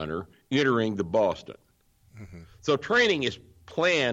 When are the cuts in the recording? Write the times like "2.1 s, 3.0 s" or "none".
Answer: 2.0 s